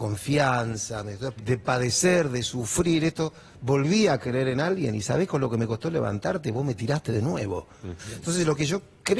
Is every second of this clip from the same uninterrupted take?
no; 2 cuts; at 1.4 s, 8.0 s

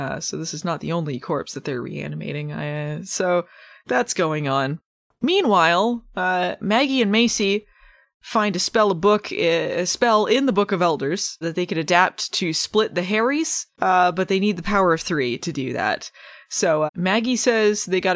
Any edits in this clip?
yes; 3 cuts; at 11.4 s, 13.7 s, 16.9 s

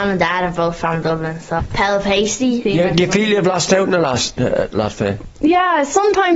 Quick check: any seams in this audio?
yes; 2 cuts; at 1.6 s, 2.6 s

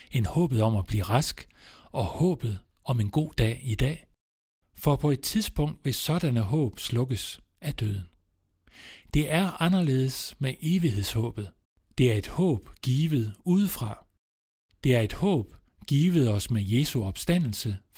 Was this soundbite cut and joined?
yes; 1 cut; at 11.8 s

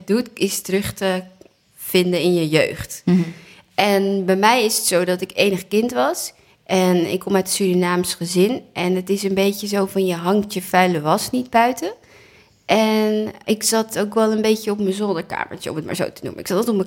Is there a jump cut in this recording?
no; 0 cuts

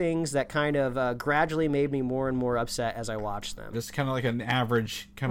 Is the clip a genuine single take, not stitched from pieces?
no; 1 cut; at 3.7 s

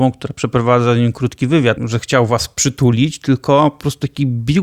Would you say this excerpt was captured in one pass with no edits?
no; 1 cut; at 1.8 s

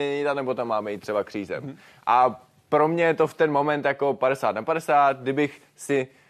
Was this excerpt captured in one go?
yes; 0 cuts

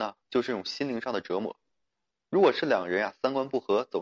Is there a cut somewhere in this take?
no; 0 cuts

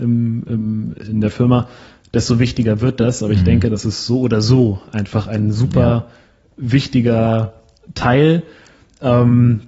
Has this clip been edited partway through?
no; 0 cuts

